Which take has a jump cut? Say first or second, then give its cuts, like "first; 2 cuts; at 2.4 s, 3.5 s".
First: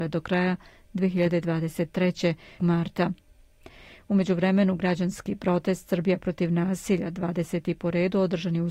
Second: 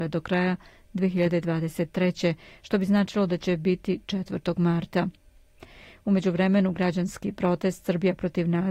first; 1 cut; at 2.6 s